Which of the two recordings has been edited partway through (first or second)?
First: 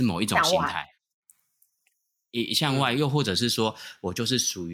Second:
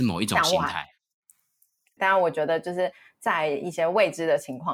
second